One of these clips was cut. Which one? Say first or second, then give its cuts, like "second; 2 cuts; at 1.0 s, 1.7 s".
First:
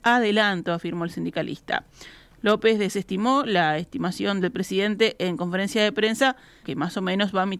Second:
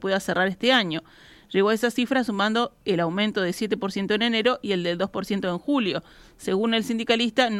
first; 1 cut; at 6.6 s